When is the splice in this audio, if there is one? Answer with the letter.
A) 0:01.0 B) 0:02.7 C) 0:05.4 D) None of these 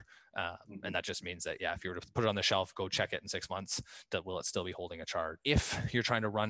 C